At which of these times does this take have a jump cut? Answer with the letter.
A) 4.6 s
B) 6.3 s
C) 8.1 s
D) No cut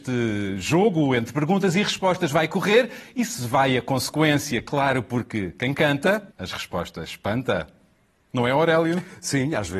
B